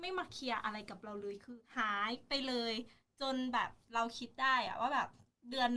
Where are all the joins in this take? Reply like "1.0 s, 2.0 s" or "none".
1.7 s